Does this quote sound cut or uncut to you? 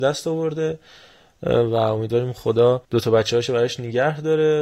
cut